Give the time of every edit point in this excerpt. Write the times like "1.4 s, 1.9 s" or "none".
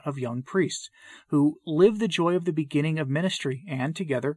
none